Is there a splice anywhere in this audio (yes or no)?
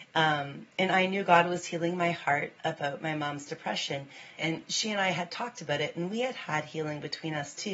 yes